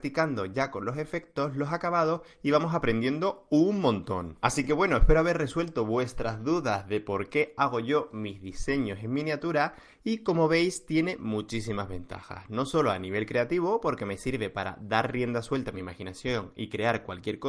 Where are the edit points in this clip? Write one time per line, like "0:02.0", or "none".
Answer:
none

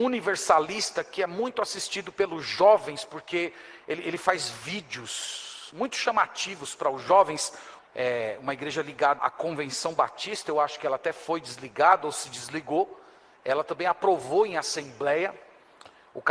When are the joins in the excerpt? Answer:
0:07.8
0:09.2

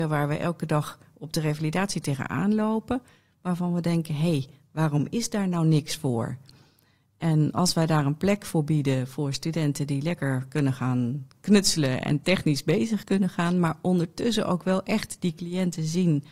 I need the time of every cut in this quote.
none

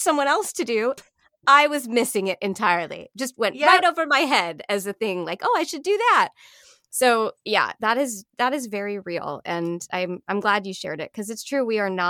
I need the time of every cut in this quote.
0:01.0

